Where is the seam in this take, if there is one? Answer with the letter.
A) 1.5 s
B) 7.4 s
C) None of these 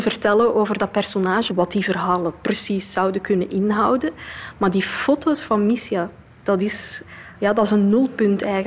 A